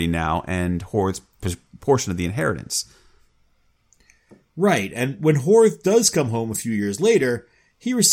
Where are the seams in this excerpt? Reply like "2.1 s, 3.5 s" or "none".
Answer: none